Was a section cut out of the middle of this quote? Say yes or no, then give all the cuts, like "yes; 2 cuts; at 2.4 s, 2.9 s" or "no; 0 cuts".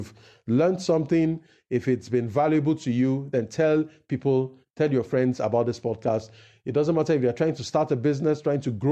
no; 0 cuts